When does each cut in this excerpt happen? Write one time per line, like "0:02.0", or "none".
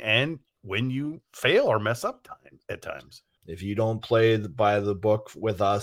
0:03.4

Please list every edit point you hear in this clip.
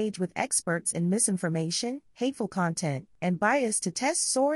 none

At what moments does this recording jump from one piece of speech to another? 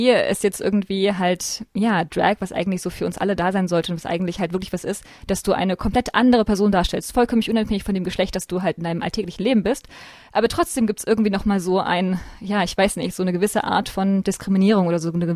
none

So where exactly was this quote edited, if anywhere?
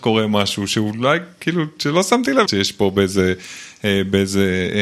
0:02.5

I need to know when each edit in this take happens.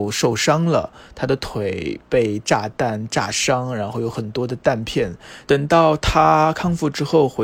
0:05.5

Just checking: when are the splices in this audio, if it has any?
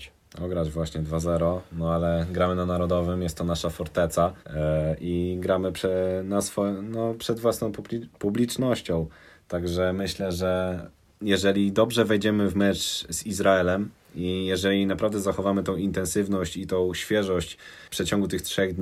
0:04.4

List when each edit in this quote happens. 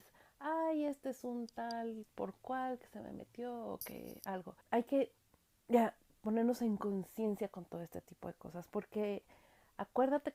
0:04.6

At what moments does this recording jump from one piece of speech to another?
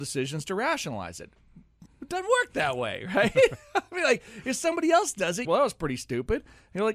0:01.9
0:05.4

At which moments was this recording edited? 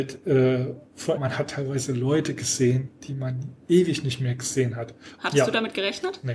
0:01.2
0:05.2

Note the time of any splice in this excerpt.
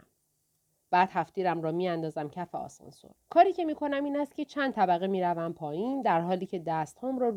0:03.1

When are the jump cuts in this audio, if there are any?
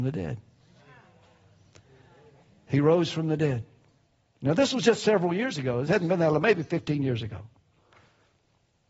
none

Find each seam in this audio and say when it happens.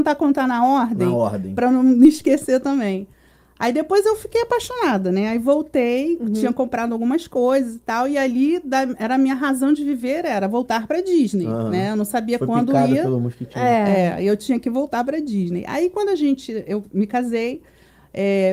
none

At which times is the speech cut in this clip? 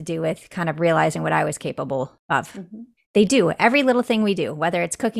0:03.0

